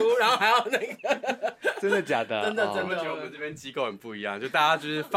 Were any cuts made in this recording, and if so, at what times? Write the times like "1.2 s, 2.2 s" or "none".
none